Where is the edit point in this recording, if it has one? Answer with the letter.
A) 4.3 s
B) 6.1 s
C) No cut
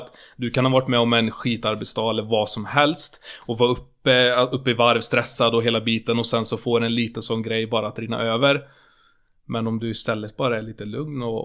C